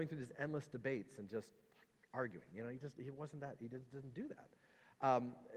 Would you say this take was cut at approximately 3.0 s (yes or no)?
no